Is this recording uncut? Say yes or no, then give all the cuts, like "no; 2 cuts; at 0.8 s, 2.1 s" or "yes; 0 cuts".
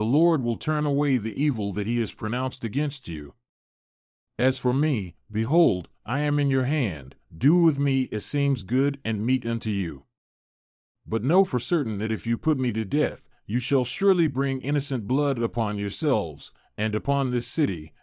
yes; 0 cuts